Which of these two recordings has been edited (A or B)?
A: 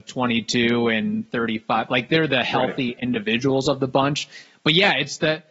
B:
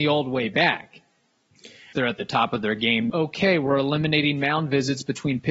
B